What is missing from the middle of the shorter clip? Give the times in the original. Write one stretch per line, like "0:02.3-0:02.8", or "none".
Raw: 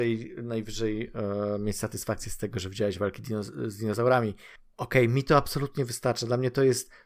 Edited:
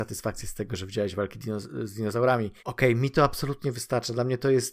0:04.4-0:04.7

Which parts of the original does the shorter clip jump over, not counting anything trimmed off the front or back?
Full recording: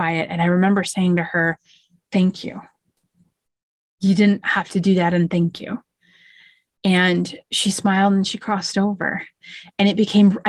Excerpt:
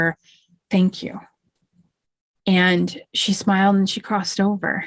0:03.8-0:06.7

